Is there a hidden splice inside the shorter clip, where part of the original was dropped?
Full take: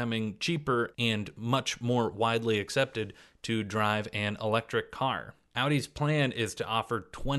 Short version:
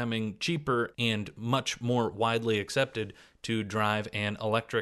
no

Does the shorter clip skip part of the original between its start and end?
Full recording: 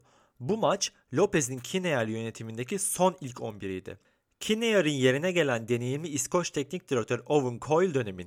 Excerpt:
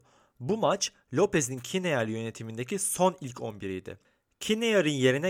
no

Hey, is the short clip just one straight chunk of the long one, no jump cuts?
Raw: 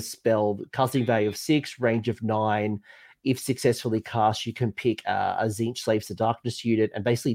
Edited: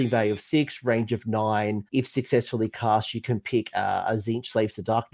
no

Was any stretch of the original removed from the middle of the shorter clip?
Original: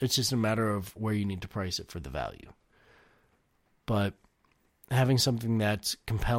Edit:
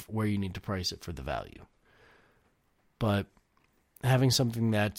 no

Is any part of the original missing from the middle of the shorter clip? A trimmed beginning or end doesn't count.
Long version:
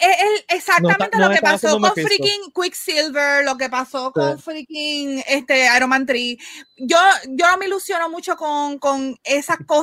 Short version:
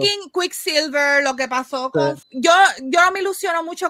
yes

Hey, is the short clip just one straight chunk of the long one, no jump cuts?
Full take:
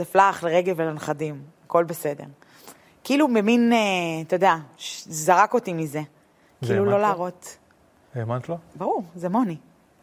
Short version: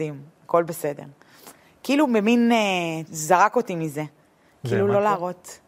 no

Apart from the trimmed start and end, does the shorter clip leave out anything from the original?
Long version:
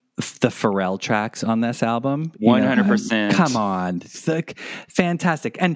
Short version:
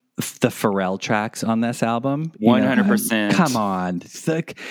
no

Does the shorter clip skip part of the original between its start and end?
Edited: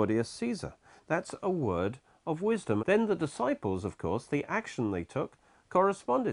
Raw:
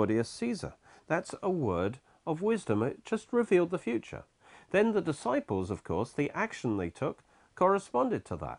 yes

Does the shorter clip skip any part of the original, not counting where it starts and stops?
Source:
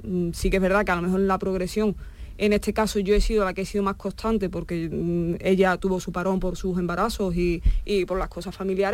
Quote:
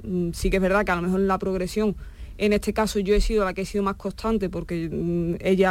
no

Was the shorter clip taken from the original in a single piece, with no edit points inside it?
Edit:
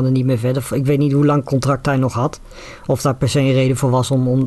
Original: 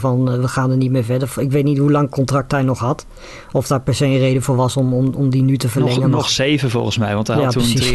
yes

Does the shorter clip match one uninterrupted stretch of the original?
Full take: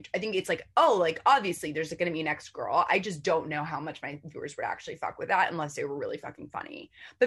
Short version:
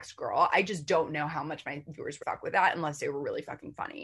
no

